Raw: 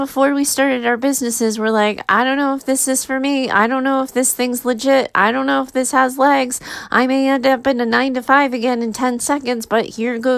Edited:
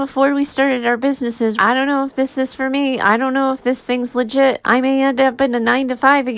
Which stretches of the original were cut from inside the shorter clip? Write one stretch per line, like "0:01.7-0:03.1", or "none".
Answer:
0:01.6-0:02.1
0:05.1-0:06.9